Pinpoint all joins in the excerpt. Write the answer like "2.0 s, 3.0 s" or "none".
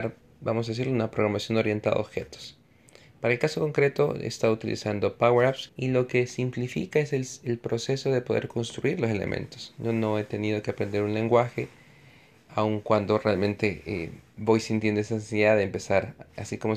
5.7 s